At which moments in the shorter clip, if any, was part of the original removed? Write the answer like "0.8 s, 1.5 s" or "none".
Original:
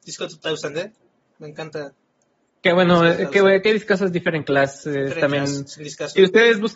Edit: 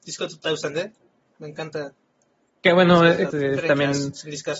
3.3 s